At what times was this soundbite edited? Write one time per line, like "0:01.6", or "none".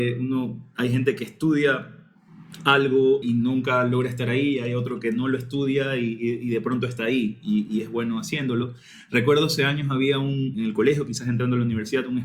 0:03.2
0:10.5